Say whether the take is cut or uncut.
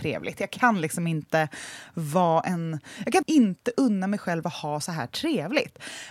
cut